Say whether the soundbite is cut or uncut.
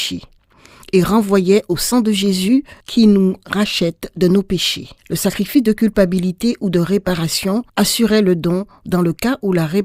cut